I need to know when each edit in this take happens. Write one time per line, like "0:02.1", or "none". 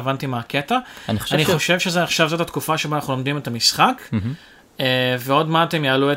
none